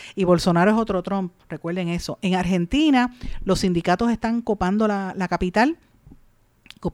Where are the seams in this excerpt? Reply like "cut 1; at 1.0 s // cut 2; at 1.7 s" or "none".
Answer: none